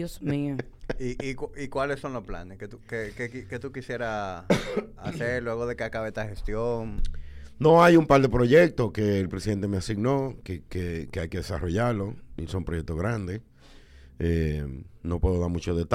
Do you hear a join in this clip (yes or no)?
no